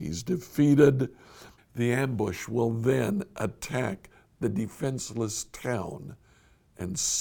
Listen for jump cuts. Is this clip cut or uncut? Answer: cut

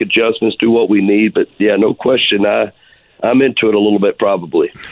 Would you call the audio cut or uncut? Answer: uncut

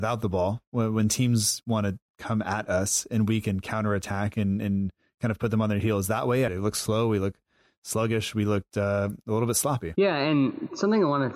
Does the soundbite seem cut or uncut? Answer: cut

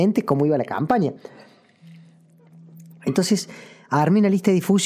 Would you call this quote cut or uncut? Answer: uncut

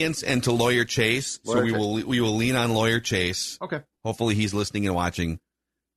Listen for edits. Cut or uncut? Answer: uncut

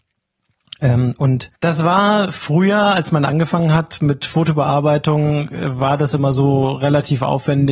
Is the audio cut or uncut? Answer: cut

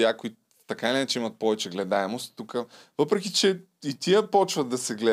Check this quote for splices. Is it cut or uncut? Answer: uncut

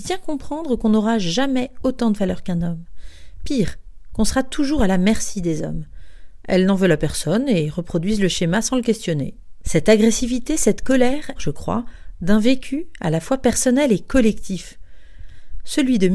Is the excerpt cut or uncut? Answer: cut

